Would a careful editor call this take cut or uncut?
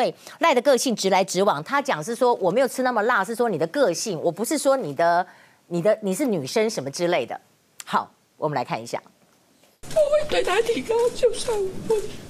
uncut